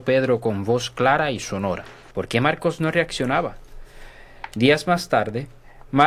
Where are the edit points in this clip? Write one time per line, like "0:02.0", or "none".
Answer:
0:02.1

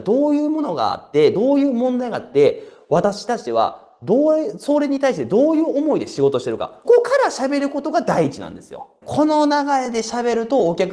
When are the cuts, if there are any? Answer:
0:06.8
0:09.0

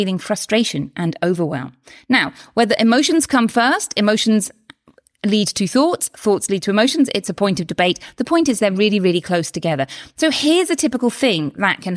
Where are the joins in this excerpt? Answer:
none

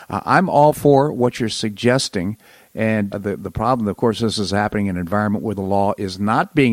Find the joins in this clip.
0:03.1

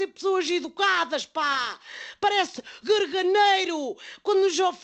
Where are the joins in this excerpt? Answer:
none

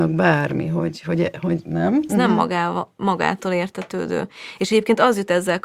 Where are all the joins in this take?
0:02.1

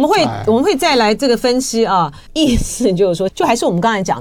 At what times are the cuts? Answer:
0:02.3
0:03.3

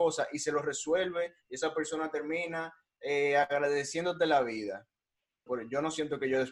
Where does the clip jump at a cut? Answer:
0:05.5

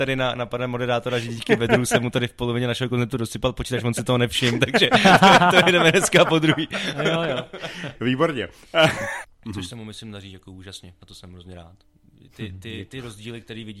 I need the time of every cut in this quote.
0:08.0
0:09.2

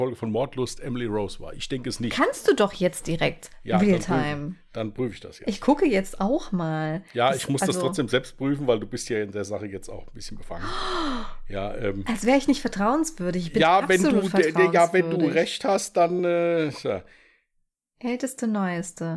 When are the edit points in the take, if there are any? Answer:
none

